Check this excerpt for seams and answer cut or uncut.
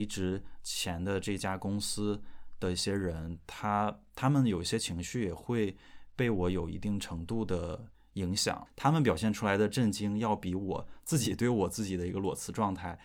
uncut